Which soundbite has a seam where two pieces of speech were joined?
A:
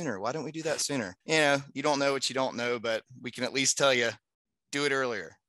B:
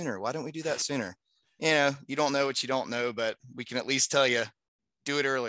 A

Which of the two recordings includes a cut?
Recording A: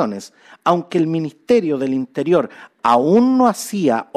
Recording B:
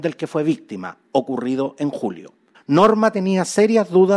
B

